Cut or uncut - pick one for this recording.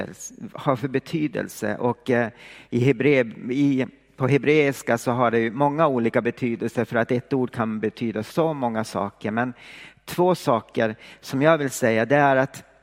uncut